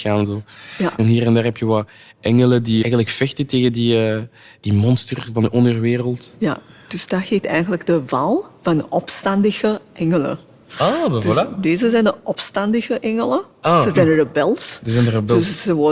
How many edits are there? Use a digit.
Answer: 0